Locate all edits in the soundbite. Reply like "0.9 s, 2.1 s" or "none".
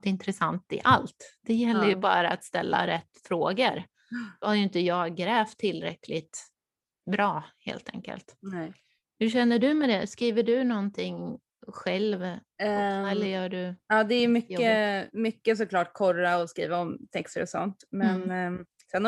none